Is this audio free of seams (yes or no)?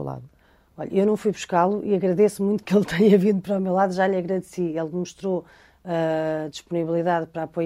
yes